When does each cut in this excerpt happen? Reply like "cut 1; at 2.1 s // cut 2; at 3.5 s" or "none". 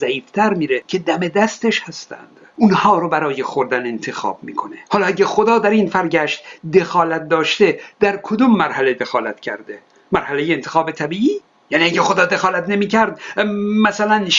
cut 1; at 4.8 s